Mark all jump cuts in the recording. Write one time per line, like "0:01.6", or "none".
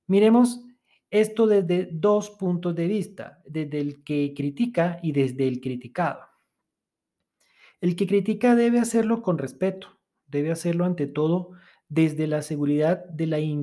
none